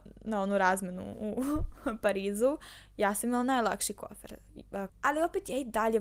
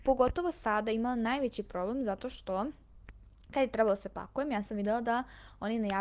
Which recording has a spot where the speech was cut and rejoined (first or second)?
first